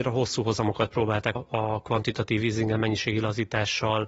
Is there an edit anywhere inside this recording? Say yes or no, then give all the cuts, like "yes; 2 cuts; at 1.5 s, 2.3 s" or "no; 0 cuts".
yes; 1 cut; at 1.4 s